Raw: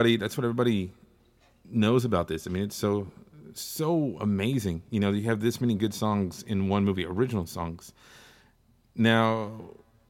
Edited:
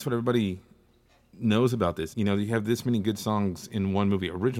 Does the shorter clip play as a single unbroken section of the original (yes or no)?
no